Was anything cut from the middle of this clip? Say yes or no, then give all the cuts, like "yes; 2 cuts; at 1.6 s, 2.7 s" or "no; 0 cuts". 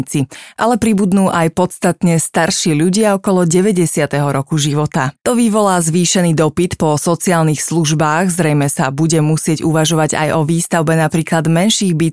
yes; 1 cut; at 5.2 s